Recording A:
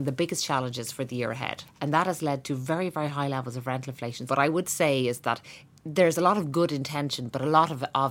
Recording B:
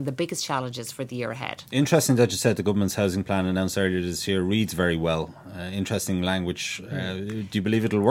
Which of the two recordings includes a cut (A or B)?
A